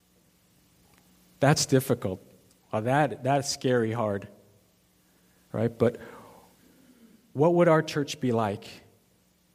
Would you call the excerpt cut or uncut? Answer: uncut